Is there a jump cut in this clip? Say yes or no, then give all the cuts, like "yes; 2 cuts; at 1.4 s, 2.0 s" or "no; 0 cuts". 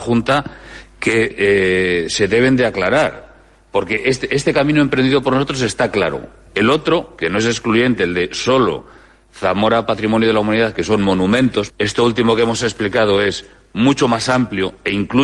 yes; 1 cut; at 11.7 s